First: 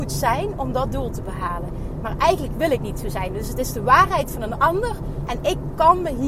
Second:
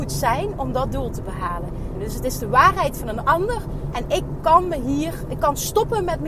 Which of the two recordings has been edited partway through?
second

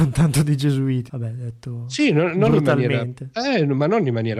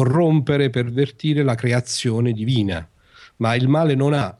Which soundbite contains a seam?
first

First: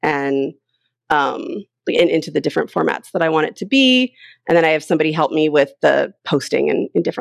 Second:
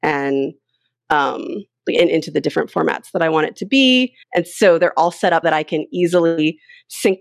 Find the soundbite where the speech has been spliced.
second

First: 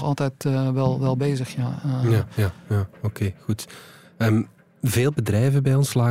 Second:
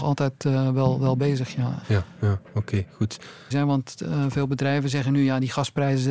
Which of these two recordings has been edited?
second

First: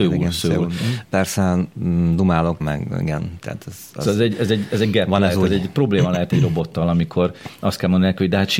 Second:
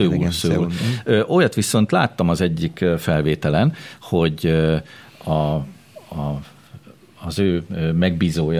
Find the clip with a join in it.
first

